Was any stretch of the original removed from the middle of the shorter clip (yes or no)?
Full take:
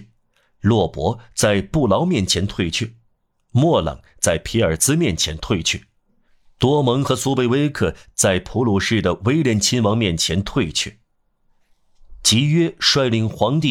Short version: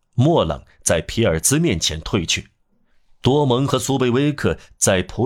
no